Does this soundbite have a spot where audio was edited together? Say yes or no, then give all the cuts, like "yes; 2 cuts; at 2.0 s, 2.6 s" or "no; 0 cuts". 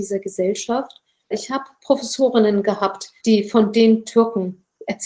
yes; 2 cuts; at 1.3 s, 3.2 s